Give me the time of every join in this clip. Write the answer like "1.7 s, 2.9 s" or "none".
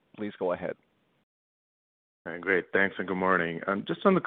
none